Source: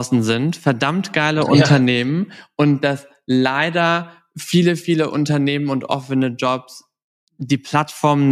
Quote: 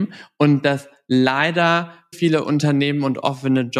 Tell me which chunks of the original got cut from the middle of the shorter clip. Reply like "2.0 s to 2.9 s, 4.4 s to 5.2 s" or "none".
4.3 s to 4.8 s